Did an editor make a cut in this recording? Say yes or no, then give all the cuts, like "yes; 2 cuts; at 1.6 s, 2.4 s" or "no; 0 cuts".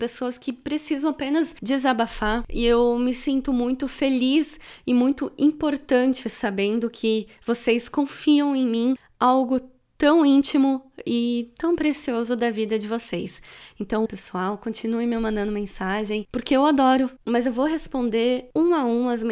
yes; 2 cuts; at 14.1 s, 17.2 s